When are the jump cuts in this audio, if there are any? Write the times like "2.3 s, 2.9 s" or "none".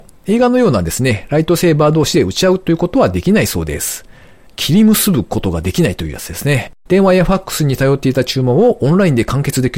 6.9 s